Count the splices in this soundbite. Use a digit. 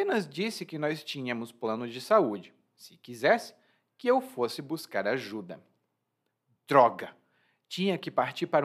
0